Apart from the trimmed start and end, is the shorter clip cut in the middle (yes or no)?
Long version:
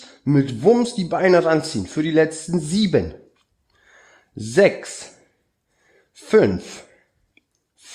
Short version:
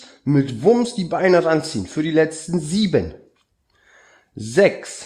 no